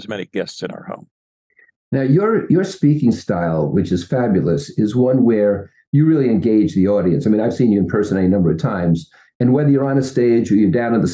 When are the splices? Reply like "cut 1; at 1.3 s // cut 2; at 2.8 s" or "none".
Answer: none